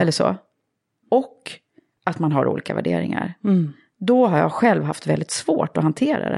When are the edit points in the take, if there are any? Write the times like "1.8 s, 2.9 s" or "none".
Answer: 1.0 s